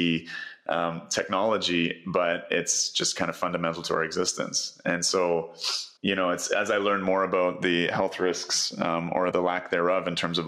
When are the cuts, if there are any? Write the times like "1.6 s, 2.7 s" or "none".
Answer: 6.0 s, 9.3 s

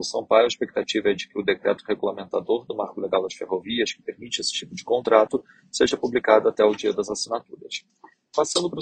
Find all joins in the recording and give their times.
none

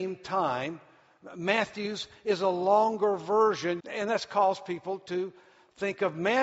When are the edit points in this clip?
3.8 s

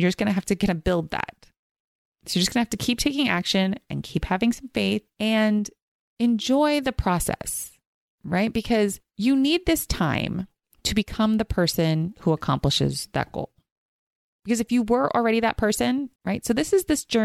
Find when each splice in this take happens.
16.2 s

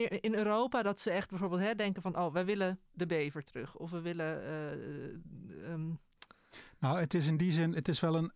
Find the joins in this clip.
2.9 s

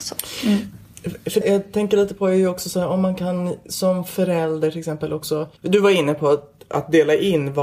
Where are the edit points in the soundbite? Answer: 1.4 s, 5.6 s

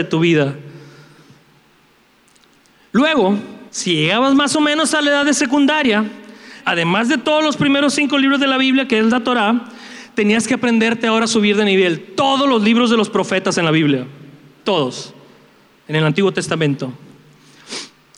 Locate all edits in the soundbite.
3.7 s, 6.6 s

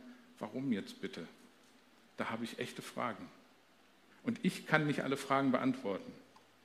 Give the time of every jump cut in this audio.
4.1 s

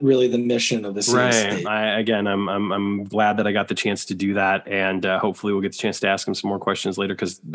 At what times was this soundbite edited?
1.6 s

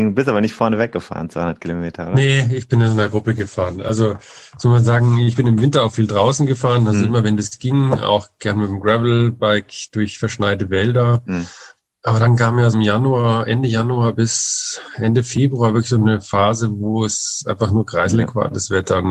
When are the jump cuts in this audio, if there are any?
12.7 s

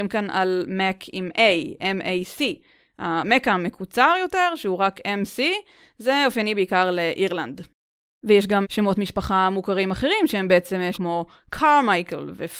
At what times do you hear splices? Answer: 8.6 s, 10.9 s

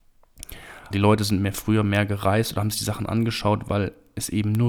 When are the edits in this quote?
0.9 s

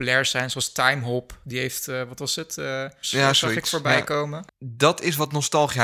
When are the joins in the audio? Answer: 3.0 s, 4.5 s

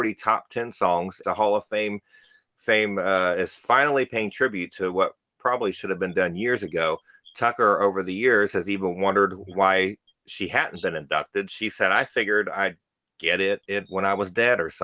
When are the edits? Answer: 1.2 s

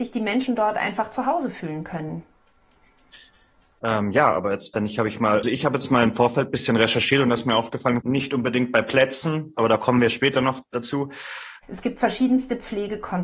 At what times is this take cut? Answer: 5.4 s, 8.0 s, 11.6 s

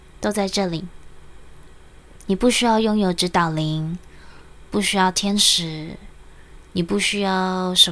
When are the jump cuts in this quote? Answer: none

